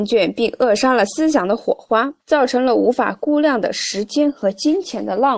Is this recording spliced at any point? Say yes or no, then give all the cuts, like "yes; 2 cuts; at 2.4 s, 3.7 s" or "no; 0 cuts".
yes; 1 cut; at 2.2 s